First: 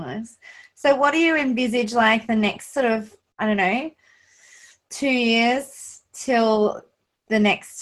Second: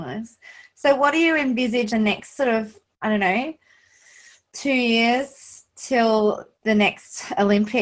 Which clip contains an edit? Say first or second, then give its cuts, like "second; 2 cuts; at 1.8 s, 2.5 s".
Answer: second; 2 cuts; at 1.9 s, 6.5 s